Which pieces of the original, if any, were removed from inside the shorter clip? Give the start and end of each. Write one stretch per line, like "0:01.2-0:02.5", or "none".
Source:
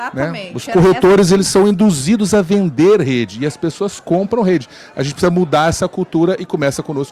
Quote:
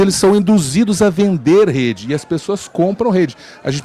none